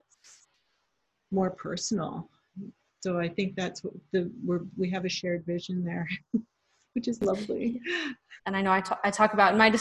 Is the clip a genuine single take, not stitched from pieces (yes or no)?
no